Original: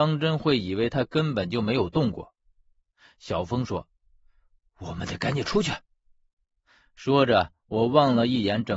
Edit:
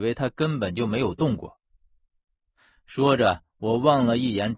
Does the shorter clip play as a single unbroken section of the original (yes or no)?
no